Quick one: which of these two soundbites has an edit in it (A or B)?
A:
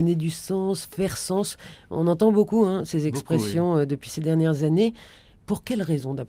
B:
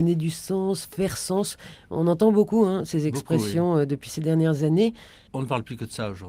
B